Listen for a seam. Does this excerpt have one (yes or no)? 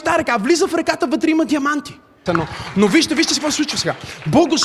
yes